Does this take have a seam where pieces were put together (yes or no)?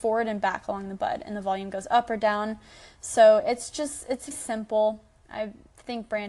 yes